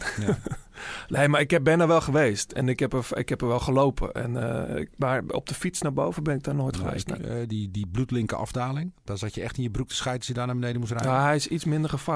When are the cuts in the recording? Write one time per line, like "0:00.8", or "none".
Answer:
0:07.2